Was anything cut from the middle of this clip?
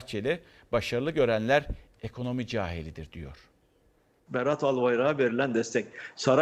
no; 0 cuts

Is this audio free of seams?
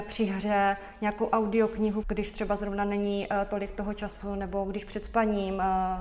no; 1 cut; at 2.0 s

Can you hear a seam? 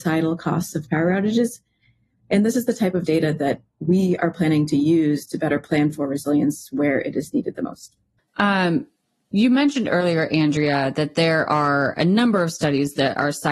yes; 1 cut; at 8.3 s

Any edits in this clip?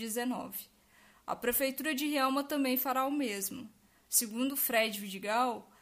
no; 0 cuts

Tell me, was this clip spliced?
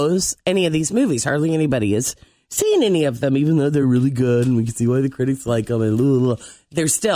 no; 0 cuts

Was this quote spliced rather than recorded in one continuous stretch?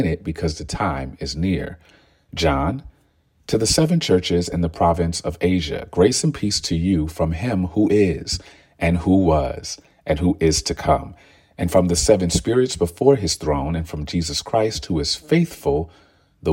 no; 0 cuts

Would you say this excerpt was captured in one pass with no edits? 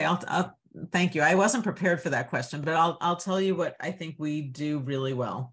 yes; 0 cuts

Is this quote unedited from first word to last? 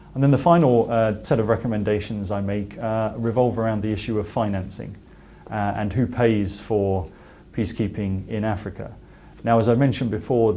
yes; 0 cuts

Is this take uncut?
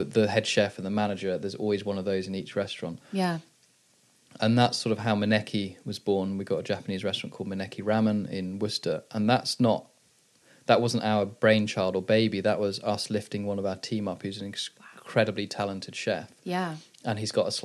yes; 0 cuts

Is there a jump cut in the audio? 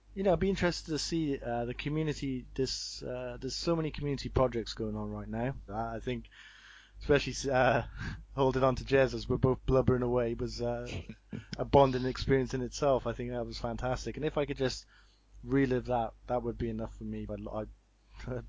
yes; 2 cuts; at 5.7 s, 17.3 s

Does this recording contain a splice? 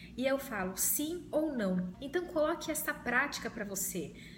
yes; 1 cut; at 1.9 s

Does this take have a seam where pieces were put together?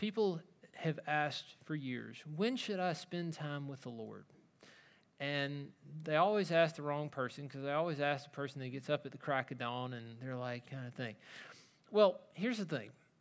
yes; 1 cut; at 10.6 s

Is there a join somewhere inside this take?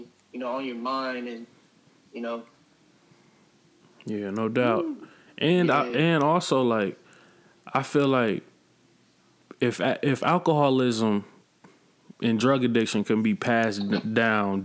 no; 0 cuts

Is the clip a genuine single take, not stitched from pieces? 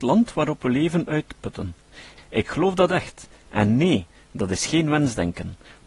no; 1 cut; at 2.2 s

